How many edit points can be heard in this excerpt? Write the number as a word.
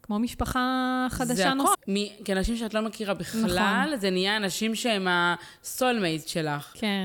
one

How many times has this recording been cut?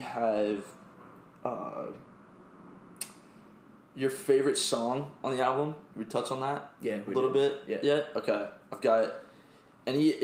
zero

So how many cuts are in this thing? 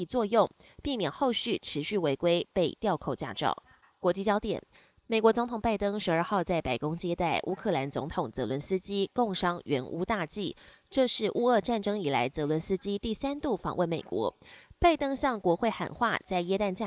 zero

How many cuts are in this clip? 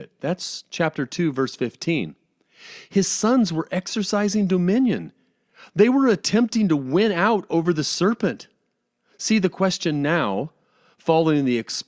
zero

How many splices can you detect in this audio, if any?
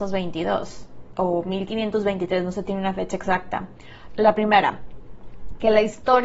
one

